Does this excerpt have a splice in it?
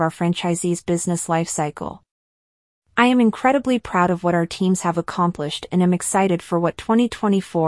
no; 0 cuts

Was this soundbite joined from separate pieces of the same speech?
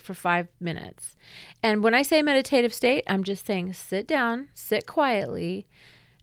yes; 1 cut; at 4.5 s

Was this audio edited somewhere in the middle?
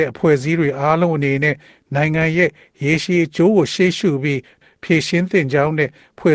no; 0 cuts

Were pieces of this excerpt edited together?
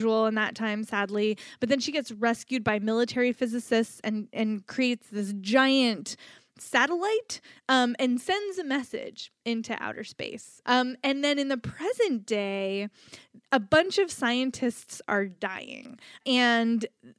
yes; 2 cuts; at 10.6 s, 16.2 s

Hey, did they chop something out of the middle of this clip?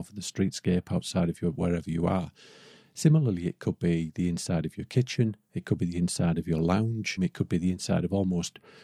yes; 1 cut; at 7.2 s

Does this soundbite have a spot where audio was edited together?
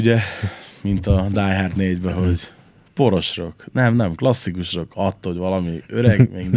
no; 0 cuts

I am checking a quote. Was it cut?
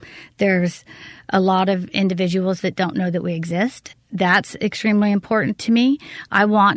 yes; 1 cut; at 3.9 s

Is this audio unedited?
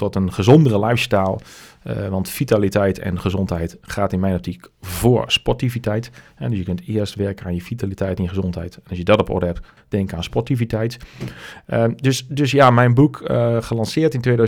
no; 1 cut; at 9.8 s

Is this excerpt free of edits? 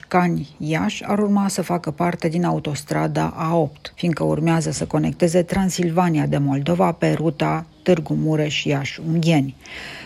no; 1 cut; at 3.9 s

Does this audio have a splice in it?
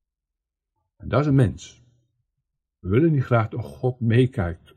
no; 0 cuts

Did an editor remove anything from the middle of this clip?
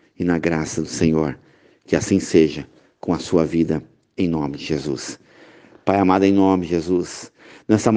no; 0 cuts

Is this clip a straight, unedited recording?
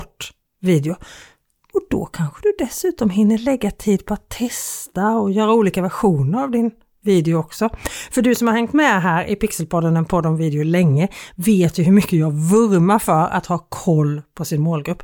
yes; 0 cuts

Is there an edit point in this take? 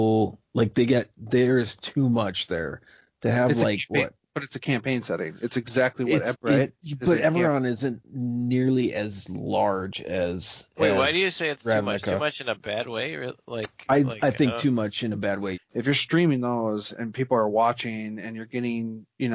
yes; 2 cuts; at 6.3 s, 15.5 s

